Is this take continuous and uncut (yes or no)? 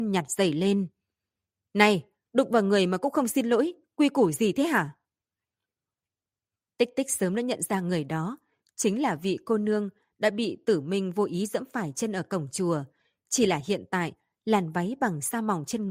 yes